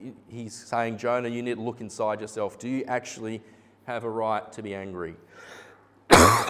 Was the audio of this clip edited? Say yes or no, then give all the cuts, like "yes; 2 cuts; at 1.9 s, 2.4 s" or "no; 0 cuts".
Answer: no; 0 cuts